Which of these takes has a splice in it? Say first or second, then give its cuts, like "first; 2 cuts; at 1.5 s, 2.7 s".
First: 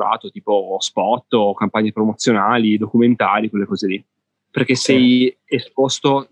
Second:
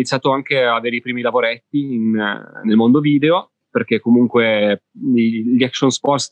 first; 1 cut; at 4.3 s